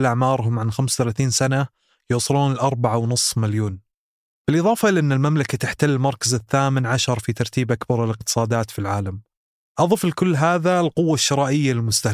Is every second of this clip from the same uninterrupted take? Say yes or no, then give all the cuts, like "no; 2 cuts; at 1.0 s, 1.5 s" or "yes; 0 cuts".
yes; 0 cuts